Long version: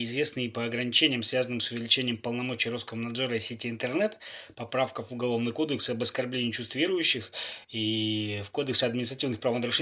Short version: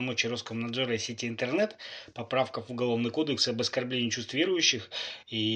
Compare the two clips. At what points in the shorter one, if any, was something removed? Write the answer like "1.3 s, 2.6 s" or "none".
none